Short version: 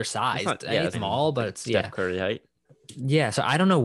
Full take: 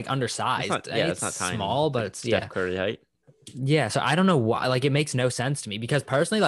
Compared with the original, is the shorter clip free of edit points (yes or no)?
no